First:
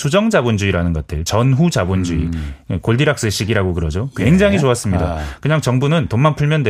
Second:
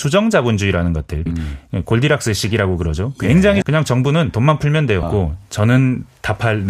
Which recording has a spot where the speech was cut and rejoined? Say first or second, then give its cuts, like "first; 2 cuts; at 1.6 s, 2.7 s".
second; 3 cuts; at 1.3 s, 3.6 s, 5.0 s